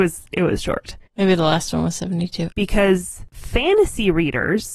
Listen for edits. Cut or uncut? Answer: cut